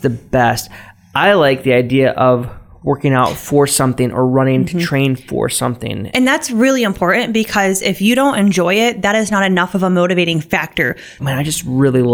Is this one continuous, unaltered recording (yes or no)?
no